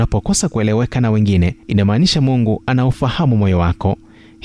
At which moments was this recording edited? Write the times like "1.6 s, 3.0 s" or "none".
1.6 s